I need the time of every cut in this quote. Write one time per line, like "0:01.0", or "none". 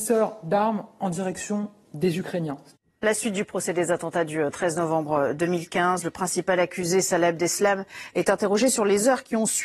none